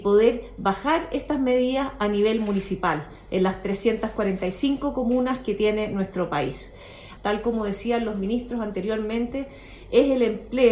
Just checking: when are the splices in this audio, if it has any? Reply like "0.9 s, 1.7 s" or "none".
7.2 s